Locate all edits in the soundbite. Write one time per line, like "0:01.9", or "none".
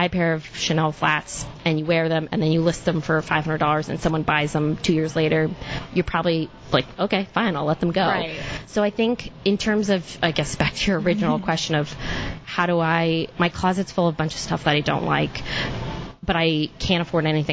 none